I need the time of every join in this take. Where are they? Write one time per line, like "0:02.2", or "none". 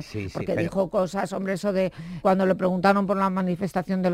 0:02.2